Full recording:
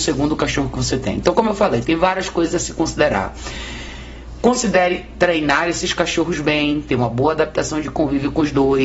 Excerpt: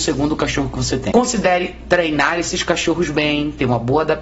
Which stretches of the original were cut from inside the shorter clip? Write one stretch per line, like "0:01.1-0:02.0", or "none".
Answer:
0:01.1-0:04.4